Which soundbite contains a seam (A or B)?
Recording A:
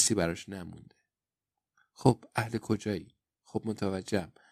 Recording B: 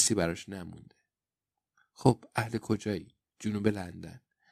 A